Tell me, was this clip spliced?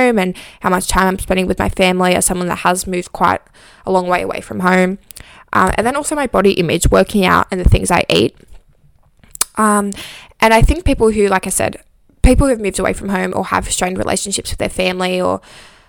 no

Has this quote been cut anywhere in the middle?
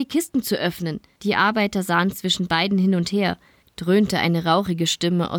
yes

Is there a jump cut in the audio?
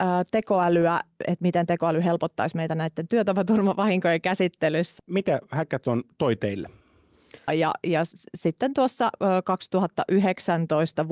yes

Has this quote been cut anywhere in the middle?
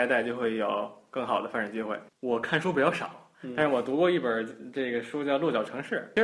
yes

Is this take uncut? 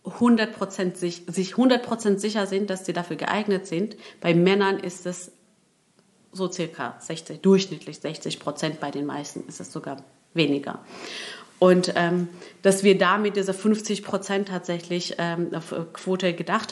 yes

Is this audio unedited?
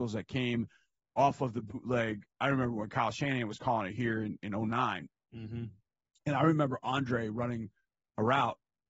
yes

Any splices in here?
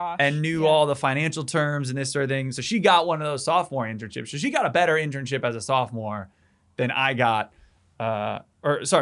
no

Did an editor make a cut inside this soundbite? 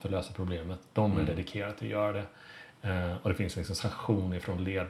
no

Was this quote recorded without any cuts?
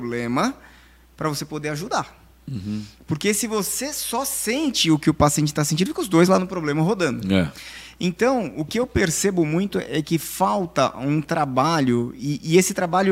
yes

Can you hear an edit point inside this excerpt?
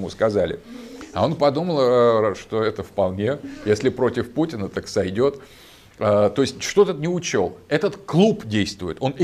no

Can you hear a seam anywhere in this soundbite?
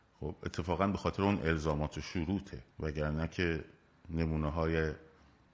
yes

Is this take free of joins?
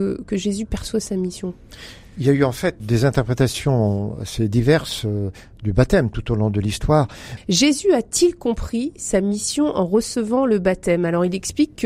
no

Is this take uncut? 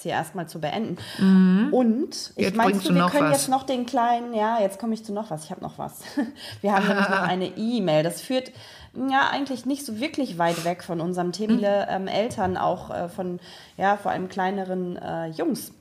no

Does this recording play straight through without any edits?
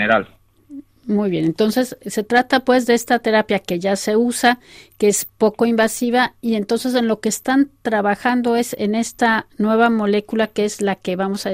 yes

